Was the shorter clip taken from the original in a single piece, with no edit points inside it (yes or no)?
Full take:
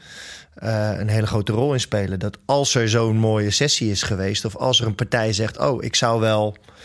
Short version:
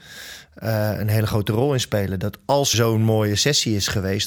no